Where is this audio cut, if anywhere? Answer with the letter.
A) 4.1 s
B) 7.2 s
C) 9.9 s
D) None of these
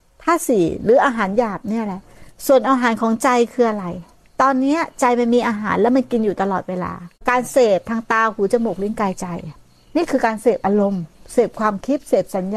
B